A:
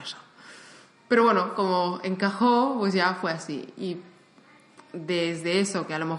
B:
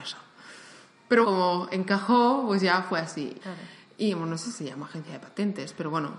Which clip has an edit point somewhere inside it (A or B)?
B